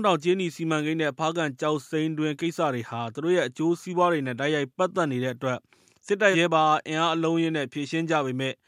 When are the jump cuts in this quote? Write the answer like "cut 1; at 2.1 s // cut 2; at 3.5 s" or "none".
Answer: cut 1; at 6.3 s